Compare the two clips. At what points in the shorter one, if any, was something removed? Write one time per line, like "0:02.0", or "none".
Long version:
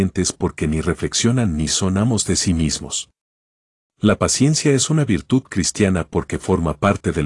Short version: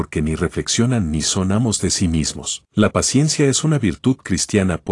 0:02.7